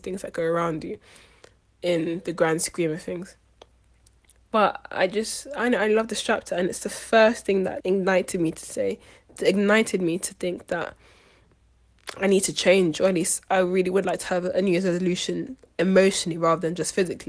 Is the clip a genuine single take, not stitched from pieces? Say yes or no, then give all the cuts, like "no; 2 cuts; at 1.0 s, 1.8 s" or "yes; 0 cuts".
no; 1 cut; at 7.8 s